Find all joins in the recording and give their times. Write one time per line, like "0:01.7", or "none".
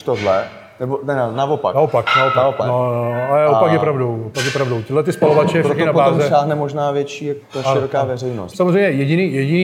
0:02.6
0:07.4
0:08.5